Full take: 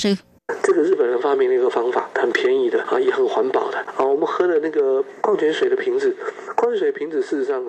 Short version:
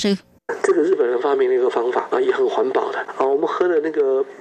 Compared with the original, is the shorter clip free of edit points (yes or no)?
no